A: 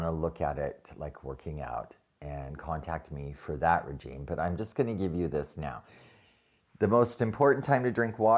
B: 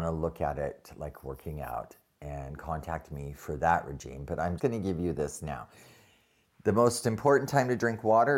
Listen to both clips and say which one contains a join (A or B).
B